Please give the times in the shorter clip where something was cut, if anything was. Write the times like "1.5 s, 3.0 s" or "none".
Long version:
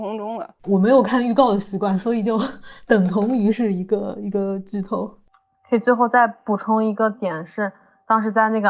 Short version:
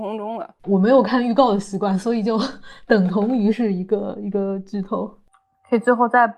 none